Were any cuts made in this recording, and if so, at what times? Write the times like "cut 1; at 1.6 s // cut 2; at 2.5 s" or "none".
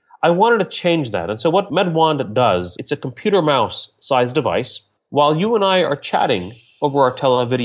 none

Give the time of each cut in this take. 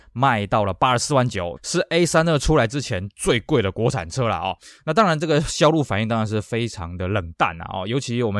cut 1; at 1.6 s

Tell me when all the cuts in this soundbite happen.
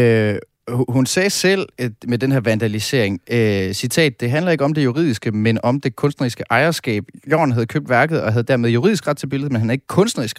none

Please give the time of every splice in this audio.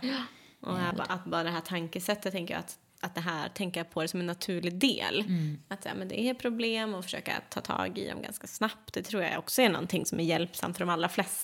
cut 1; at 0.9 s

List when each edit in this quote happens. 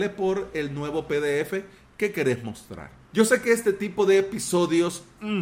cut 1; at 3.0 s

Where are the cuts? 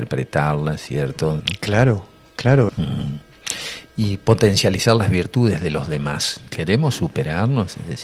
cut 1; at 1.4 s // cut 2; at 2.7 s // cut 3; at 6.5 s

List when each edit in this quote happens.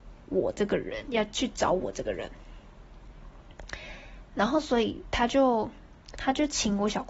none

